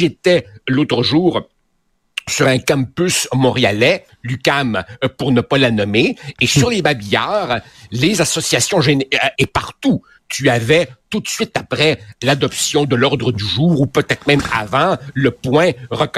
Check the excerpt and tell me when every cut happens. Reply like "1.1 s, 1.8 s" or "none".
9.3 s